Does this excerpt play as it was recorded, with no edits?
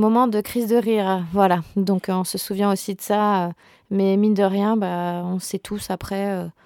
yes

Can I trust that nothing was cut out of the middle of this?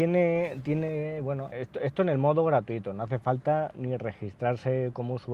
no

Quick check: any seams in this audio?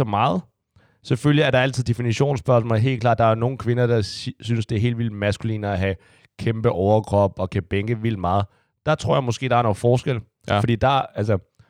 no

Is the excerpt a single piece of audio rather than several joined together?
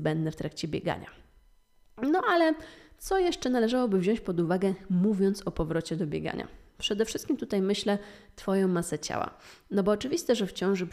yes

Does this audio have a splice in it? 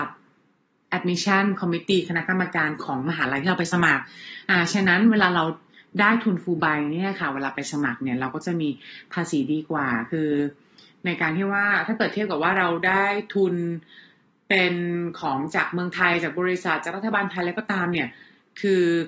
no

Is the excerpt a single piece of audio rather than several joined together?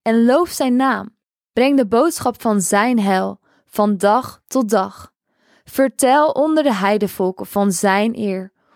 yes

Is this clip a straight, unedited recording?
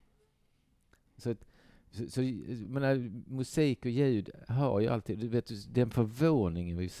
yes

